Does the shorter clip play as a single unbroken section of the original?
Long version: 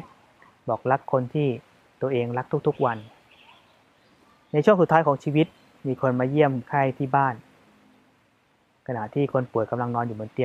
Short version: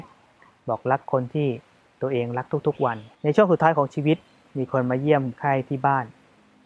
no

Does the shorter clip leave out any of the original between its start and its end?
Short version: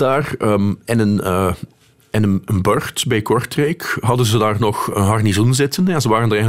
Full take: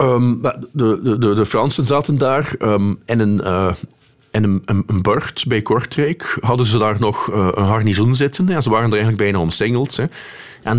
yes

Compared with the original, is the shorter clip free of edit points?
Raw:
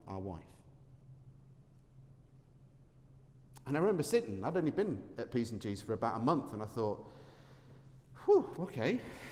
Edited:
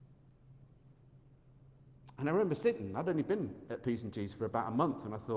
yes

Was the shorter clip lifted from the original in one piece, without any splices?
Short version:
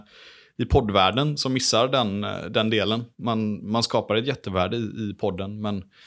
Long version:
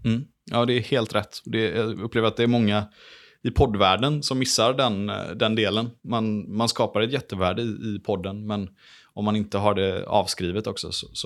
yes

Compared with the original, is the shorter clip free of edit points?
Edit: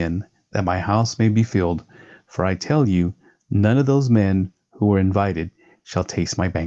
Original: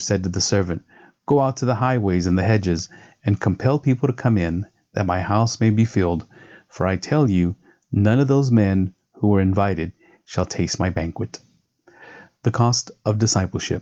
yes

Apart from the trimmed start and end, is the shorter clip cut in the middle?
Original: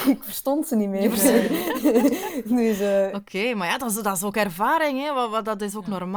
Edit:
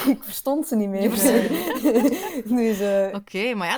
no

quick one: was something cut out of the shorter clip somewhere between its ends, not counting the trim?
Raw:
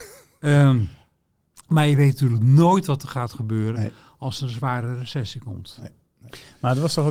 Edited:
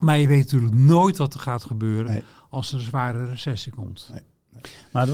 no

